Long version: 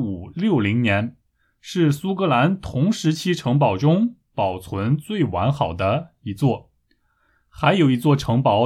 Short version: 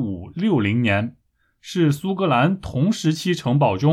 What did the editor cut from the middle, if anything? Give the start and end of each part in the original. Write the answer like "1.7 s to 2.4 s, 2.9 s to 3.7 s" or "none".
none